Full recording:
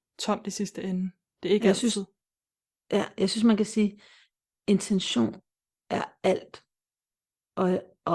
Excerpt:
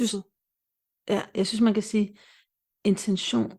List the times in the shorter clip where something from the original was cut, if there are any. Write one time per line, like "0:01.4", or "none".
none

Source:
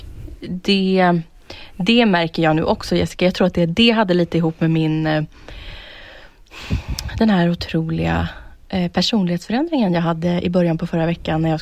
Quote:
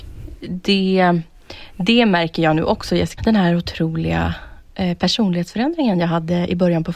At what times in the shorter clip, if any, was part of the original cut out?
0:03.2

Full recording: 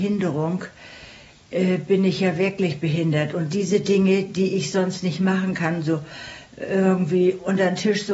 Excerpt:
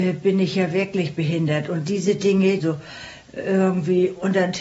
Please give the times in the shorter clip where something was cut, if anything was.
0:02.6

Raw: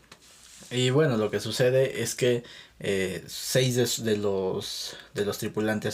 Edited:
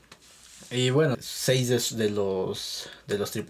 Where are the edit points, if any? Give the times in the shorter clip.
0:01.1

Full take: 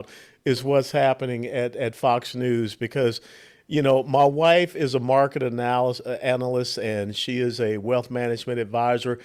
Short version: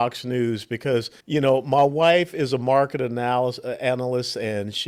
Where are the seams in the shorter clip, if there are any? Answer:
0:01.2

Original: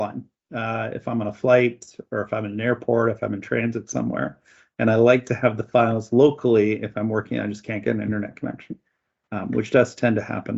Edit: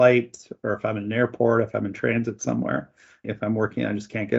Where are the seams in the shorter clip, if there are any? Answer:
0:03.2

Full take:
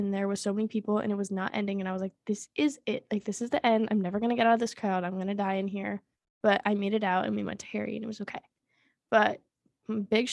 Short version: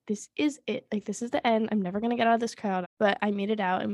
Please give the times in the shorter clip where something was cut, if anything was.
0:02.8

